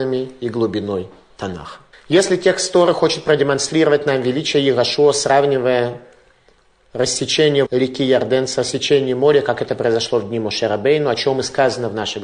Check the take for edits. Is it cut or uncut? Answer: cut